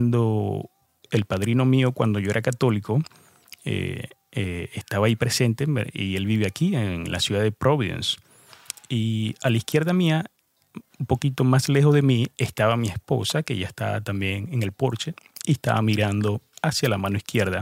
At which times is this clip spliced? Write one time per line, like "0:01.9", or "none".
none